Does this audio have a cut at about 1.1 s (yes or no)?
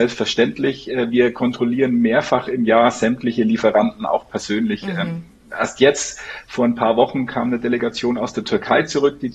no